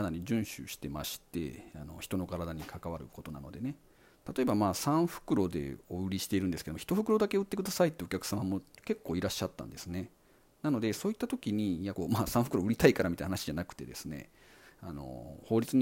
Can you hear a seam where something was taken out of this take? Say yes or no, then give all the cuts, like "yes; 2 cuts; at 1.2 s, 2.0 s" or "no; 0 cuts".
yes; 2 cuts; at 5.8 s, 11.9 s